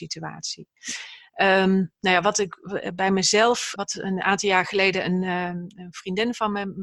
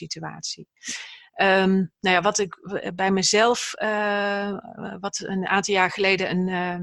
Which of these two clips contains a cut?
first; 1 cut; at 3.8 s

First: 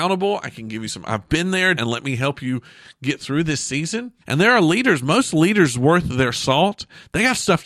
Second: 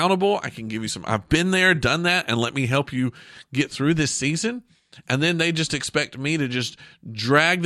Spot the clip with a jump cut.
first; 2 cuts; at 1.7 s, 4.2 s

